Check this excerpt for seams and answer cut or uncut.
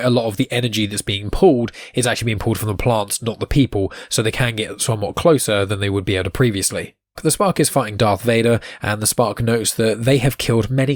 cut